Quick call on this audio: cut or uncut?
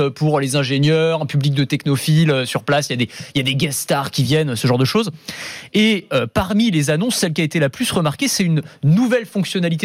uncut